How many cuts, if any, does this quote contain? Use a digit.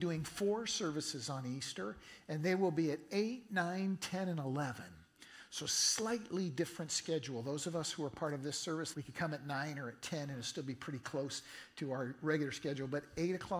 1